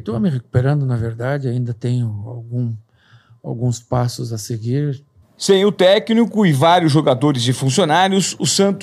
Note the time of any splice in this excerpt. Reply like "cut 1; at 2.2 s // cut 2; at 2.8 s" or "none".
cut 1; at 5.2 s